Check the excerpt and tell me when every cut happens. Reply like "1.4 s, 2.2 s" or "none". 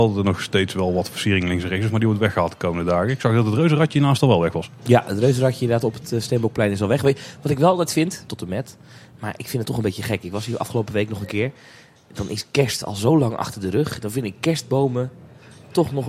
8.3 s